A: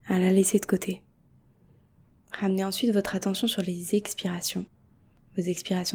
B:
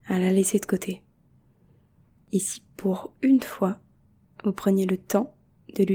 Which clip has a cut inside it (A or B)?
A